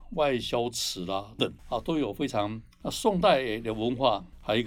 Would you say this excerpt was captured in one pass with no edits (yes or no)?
no